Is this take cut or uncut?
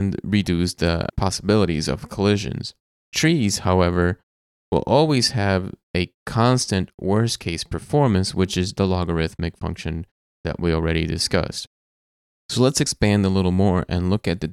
uncut